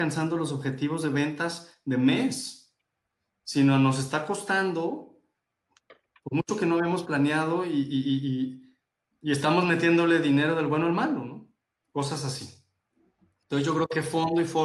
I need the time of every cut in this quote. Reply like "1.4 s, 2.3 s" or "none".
none